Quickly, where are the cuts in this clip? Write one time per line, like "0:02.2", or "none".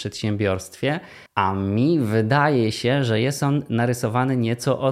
0:01.3